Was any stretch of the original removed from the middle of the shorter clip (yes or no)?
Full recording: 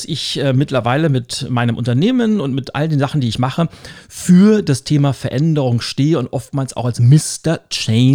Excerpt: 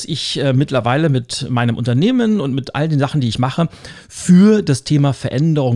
no